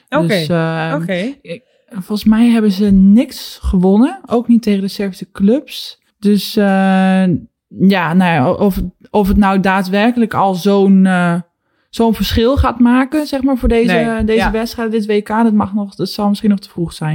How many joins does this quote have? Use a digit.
1